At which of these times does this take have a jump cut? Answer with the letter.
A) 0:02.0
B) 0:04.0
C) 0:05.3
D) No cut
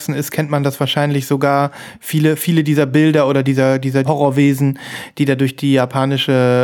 B